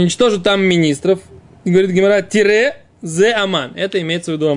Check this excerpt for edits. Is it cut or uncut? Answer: uncut